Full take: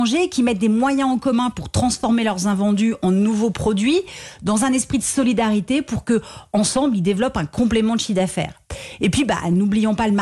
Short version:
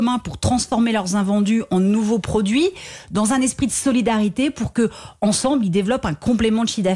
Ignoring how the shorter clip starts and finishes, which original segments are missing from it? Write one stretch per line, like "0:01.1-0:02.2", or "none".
none